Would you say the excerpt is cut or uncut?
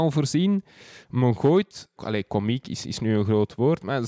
cut